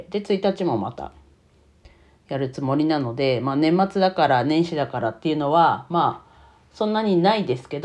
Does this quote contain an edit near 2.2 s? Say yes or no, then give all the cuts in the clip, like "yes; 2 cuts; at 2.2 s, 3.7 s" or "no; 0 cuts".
no; 0 cuts